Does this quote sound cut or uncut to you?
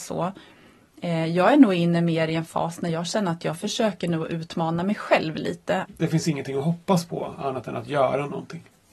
cut